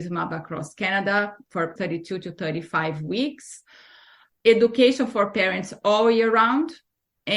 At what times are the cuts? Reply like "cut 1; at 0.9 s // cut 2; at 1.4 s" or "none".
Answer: cut 1; at 1.8 s